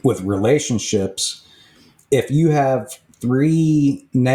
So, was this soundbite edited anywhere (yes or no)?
no